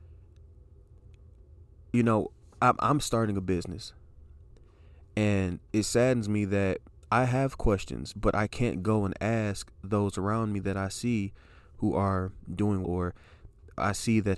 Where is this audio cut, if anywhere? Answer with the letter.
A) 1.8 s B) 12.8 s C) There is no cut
B